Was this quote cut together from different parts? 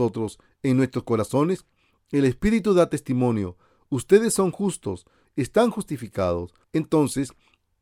yes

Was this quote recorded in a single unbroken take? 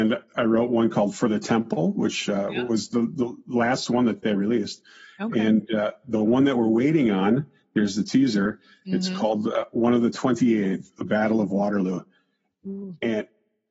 yes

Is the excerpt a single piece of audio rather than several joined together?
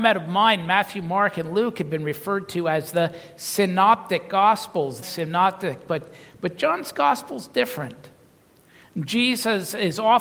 no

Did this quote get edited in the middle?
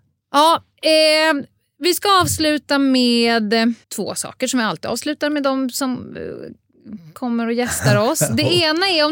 yes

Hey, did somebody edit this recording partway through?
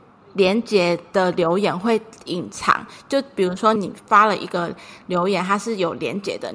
yes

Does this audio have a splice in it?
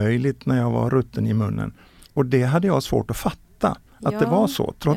no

